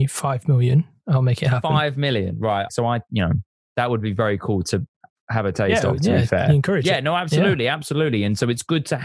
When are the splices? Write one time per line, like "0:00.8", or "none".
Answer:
0:02.7